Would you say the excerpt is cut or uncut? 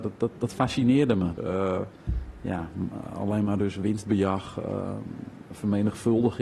cut